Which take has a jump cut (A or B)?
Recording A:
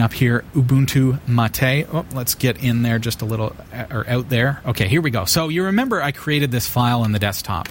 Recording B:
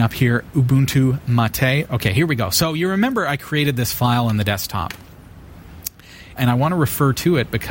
B